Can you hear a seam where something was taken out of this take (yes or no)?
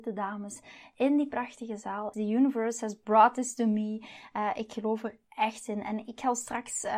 yes